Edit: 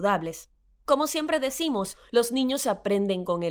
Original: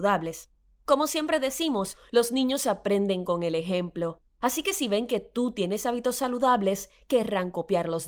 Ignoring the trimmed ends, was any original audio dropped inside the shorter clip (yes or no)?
no